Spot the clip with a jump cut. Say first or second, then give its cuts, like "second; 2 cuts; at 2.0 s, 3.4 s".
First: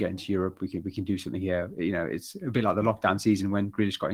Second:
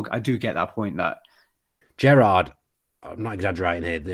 second; 1 cut; at 1.8 s